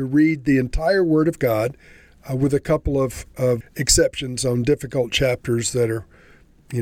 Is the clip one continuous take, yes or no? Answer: no